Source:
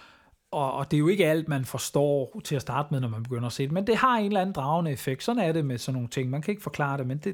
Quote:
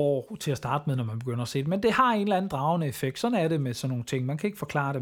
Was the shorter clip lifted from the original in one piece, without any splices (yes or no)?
yes